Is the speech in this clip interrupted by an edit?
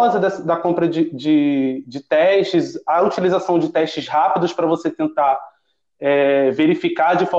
no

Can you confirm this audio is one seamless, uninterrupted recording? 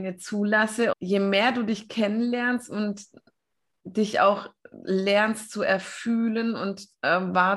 no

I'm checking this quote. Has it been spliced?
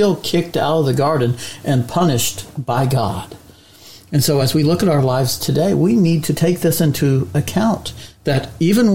no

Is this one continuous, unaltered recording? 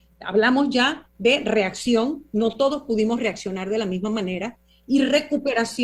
no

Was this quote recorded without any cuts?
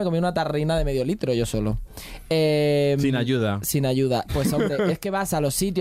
no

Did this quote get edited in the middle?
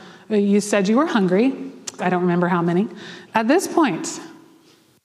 yes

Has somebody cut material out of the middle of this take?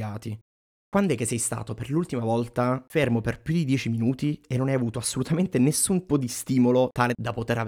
yes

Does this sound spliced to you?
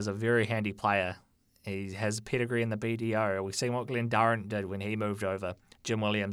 no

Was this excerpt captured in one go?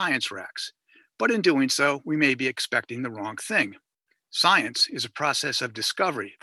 yes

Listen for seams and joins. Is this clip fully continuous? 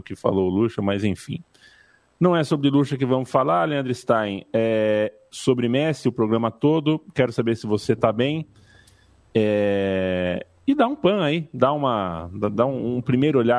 yes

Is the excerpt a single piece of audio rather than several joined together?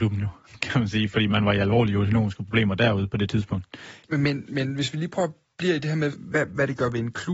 no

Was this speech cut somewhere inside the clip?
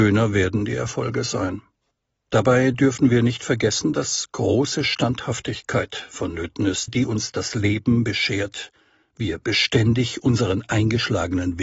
yes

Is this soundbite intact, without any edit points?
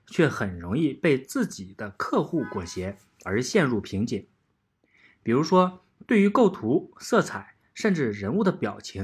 no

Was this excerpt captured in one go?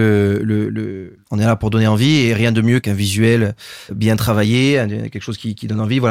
no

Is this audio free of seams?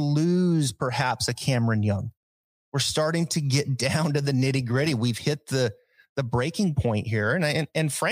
yes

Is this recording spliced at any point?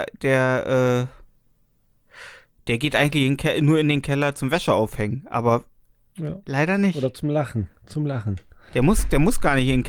no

